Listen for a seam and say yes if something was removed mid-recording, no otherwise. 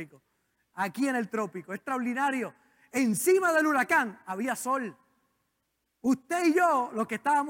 no